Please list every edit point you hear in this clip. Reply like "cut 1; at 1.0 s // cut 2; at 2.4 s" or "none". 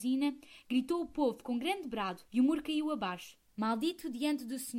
cut 1; at 2.3 s // cut 2; at 3.5 s